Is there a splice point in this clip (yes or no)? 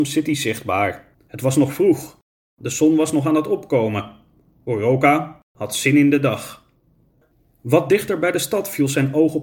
yes